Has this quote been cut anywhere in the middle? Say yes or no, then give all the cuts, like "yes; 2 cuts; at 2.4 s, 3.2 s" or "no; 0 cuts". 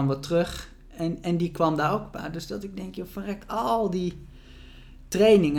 no; 0 cuts